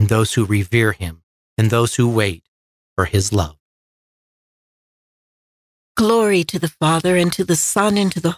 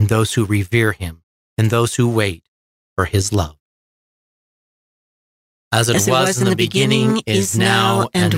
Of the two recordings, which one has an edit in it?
second; 1 cut; at 5.5 s

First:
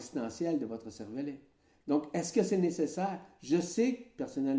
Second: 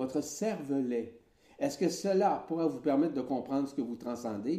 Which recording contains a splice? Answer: second; 1 cut; at 1.5 s

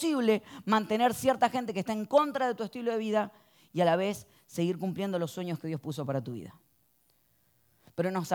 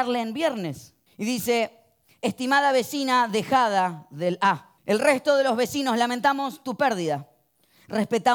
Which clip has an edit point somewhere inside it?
second; 2 cuts; at 1.1 s, 4.8 s

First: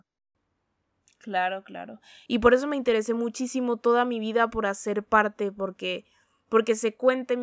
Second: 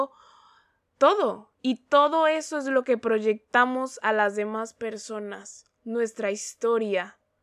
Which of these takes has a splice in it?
first; 1 cut; at 2.3 s

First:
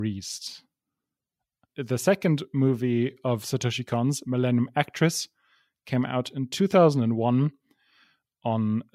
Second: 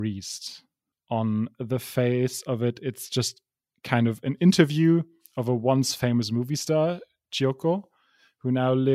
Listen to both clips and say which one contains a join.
second; 1 cut; at 0.9 s

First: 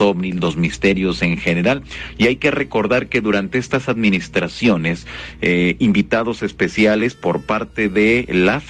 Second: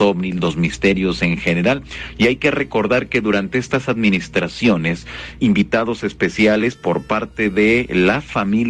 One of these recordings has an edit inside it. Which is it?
second; 1 cut; at 5.4 s

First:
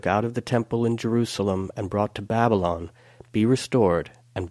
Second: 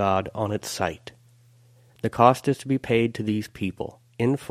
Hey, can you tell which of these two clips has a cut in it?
second; 1 cut; at 1.9 s

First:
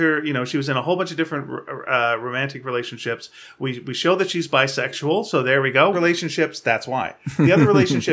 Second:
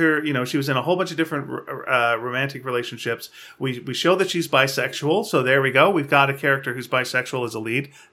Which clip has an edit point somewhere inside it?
first; 1 cut; at 5.9 s

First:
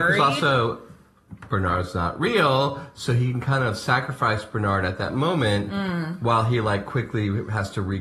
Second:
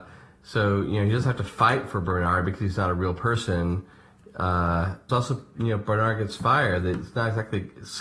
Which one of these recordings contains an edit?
second; 1 cut; at 5.1 s

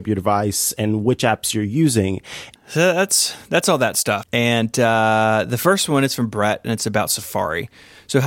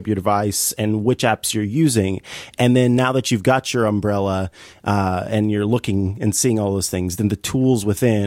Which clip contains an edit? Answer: first; 2 cuts; at 2.6 s, 4.2 s

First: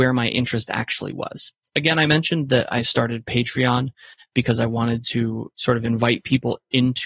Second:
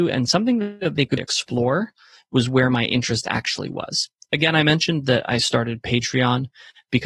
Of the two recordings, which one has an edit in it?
second; 1 cut; at 1.2 s

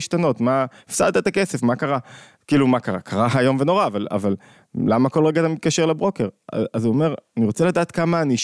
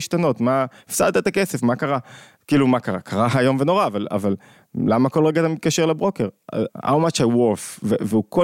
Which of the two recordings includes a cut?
second; 1 cut; at 6.7 s

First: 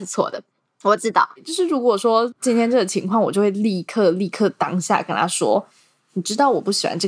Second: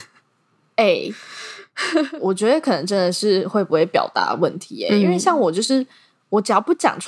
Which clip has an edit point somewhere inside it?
first; 1 cut; at 1.4 s

